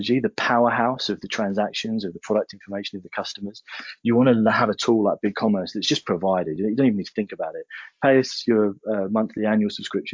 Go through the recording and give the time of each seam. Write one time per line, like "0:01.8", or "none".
none